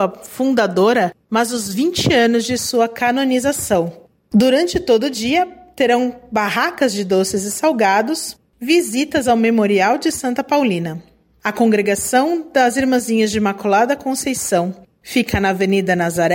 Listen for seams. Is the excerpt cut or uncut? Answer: cut